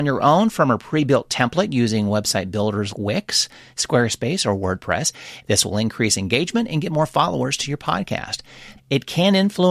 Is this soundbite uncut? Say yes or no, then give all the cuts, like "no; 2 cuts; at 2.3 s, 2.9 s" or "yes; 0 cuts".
no; 3 cuts; at 2.9 s, 5.4 s, 8.8 s